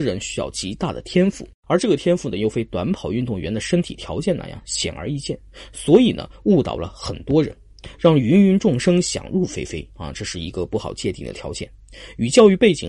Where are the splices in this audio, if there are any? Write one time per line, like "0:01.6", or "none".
none